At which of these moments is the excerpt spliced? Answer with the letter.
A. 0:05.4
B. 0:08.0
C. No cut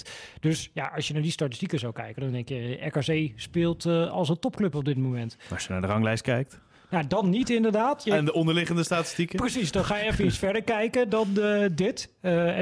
B